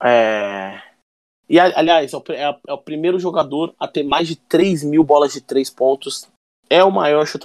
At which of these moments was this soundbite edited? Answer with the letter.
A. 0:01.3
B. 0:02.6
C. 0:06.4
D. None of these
D